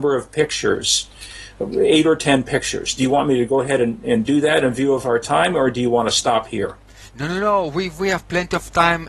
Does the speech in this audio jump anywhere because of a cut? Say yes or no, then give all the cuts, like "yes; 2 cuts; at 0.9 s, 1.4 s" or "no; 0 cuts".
no; 0 cuts